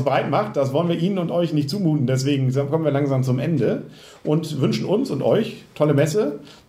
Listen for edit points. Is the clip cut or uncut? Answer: uncut